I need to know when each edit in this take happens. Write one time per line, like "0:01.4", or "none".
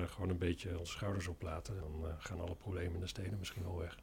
0:01.8